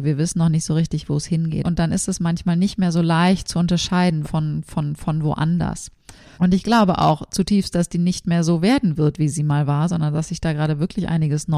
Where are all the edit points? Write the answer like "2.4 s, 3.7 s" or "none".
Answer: 1.6 s, 4.2 s, 6.3 s